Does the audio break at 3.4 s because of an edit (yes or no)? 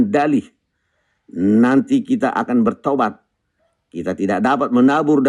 no